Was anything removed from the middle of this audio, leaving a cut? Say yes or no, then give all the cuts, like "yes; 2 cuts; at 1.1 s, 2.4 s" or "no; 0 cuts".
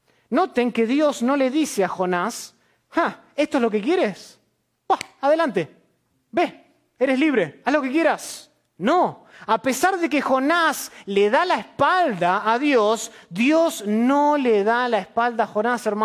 no; 0 cuts